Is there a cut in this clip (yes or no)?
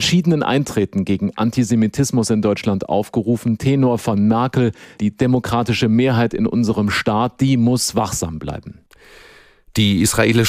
no